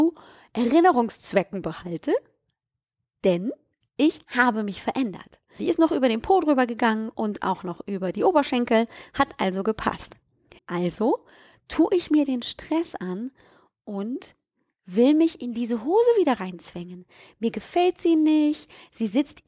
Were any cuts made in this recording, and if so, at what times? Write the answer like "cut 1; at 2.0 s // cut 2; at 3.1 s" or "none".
cut 1; at 5.6 s // cut 2; at 10.6 s